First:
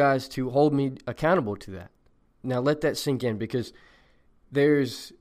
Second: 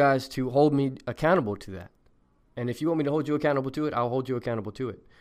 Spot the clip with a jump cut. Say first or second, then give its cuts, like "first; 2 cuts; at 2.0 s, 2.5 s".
first; 1 cut; at 2.2 s